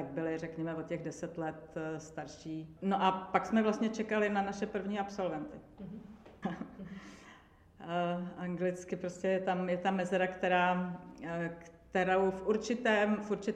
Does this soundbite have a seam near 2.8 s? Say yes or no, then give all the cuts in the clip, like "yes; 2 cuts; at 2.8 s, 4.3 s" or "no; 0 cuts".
no; 1 cut; at 6.4 s